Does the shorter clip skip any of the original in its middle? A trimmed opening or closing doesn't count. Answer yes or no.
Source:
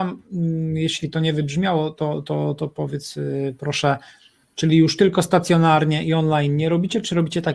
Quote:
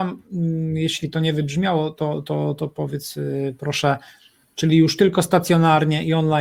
no